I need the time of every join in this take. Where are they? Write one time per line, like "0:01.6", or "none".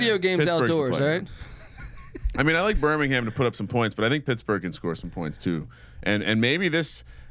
none